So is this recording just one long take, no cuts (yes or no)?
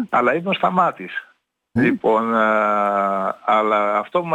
no